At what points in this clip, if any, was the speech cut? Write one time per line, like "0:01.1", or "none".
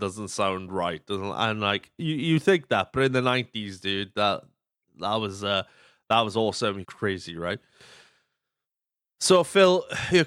0:06.8